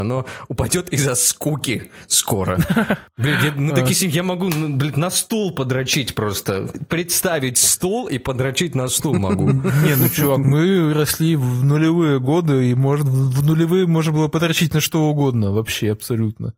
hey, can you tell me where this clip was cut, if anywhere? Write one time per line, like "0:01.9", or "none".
none